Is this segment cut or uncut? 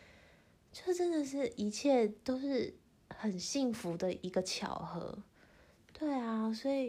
uncut